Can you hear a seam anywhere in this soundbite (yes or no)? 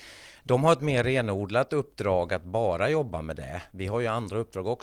no